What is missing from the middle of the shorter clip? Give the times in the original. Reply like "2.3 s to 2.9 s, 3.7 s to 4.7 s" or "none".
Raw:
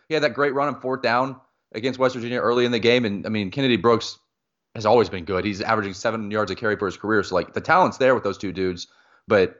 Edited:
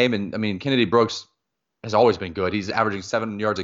none

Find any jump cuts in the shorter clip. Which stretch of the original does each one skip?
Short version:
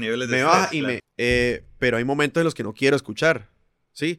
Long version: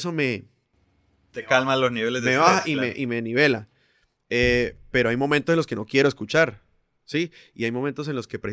2.9 s to 4.1 s

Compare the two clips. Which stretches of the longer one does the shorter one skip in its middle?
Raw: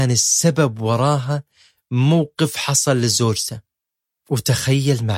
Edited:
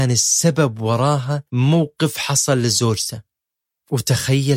1.5 s to 1.9 s

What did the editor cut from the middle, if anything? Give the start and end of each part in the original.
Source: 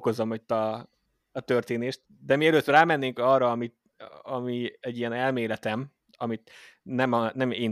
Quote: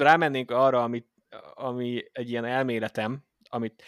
none

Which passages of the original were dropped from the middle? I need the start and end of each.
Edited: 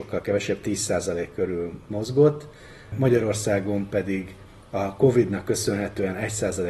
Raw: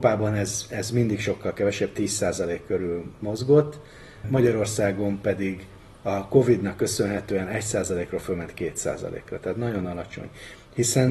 none

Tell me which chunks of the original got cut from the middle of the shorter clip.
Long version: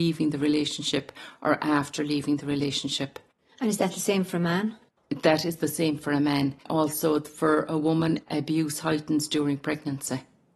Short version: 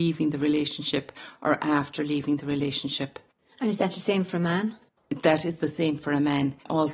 none

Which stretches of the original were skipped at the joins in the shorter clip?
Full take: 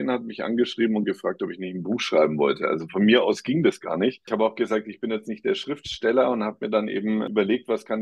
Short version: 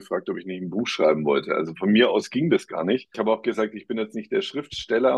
none

